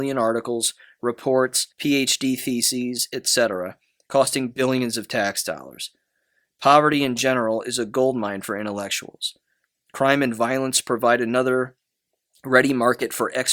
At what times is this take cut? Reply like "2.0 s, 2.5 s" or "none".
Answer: 1.7 s